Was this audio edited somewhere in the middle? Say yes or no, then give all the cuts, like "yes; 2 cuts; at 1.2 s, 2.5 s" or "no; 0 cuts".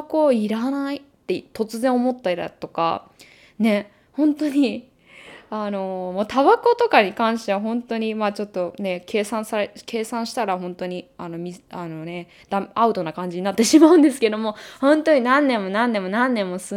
no; 0 cuts